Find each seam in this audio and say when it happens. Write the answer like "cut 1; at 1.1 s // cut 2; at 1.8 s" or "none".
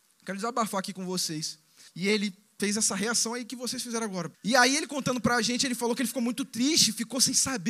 cut 1; at 1.9 s // cut 2; at 4.3 s